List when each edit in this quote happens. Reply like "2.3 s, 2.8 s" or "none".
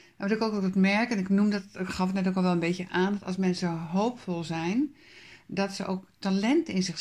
none